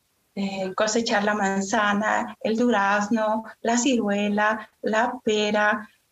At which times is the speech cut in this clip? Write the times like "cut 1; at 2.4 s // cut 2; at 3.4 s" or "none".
none